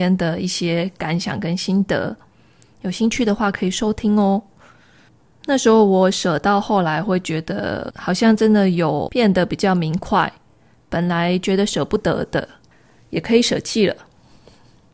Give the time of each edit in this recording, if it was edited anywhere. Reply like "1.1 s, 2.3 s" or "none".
none